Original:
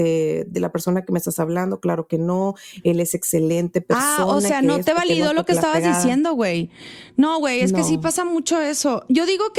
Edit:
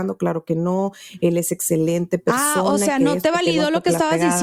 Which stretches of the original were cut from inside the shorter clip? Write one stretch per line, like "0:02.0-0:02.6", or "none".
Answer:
none